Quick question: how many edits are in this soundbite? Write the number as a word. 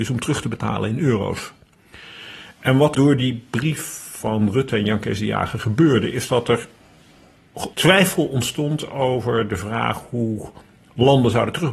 two